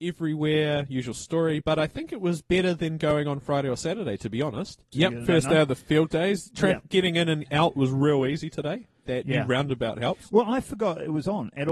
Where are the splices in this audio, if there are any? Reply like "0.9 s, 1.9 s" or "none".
4.9 s